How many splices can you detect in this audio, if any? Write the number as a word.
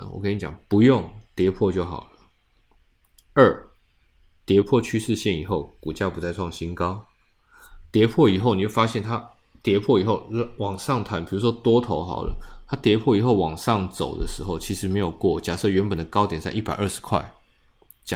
zero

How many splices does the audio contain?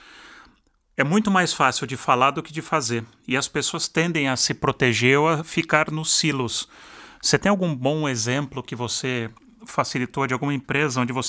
zero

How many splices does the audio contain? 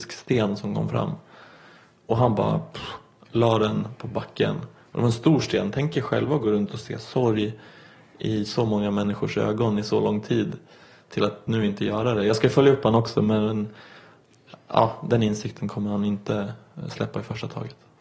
zero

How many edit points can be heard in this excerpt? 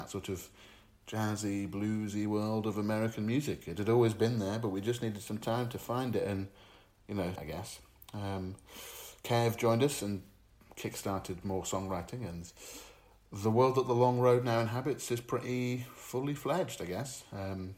one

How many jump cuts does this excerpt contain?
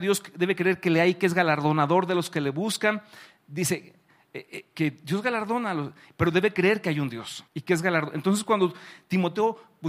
one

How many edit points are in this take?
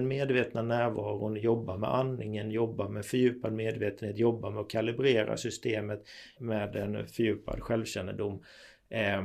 one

